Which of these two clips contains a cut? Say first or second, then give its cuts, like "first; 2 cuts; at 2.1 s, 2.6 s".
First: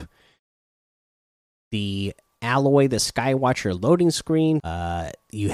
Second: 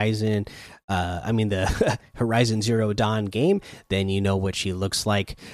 first; 1 cut; at 4.6 s